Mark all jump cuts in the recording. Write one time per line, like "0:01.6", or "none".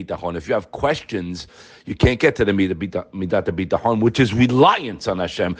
none